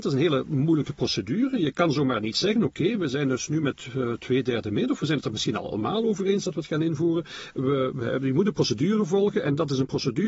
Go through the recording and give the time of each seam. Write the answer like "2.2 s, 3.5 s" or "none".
none

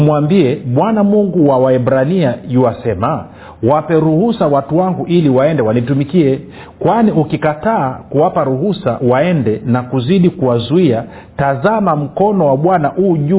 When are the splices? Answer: none

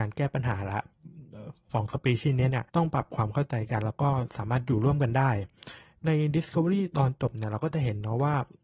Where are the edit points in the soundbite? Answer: 2.7 s

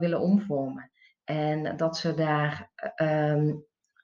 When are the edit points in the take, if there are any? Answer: none

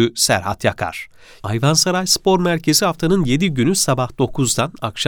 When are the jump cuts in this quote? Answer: 1.4 s

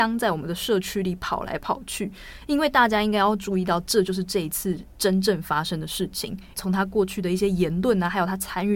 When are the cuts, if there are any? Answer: 6.5 s

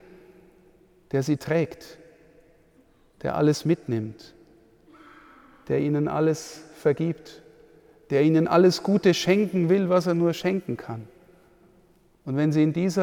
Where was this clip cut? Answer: none

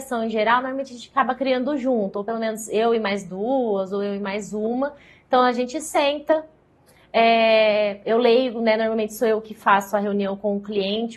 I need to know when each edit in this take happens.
none

